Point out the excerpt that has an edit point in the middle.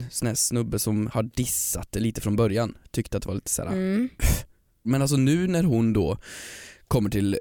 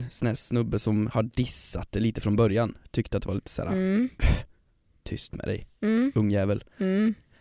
first; 1 cut; at 4.8 s

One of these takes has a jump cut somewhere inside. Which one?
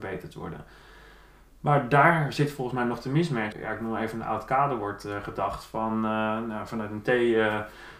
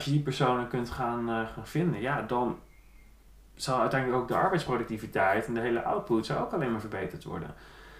first; 1 cut; at 3.5 s

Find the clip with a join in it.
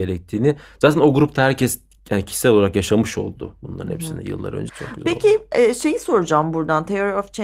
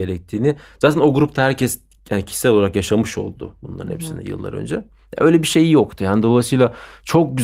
first; 1 cut; at 4.7 s

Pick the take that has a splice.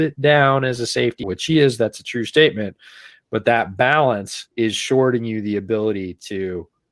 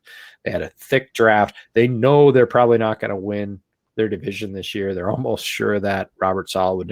first; 2 cuts; at 1.2 s, 4.5 s

